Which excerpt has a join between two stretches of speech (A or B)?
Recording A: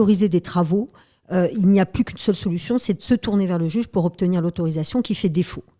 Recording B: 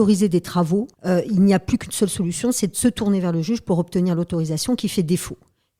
B